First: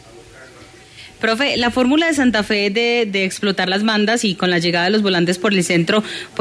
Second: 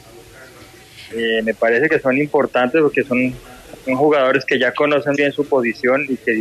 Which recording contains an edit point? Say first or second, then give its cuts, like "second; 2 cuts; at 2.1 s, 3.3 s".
second; 2 cuts; at 1.1 s, 5.1 s